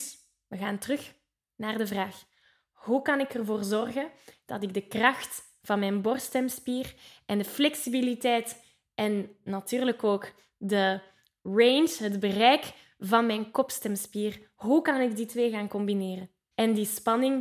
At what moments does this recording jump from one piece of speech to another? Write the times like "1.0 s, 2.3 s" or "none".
16.5 s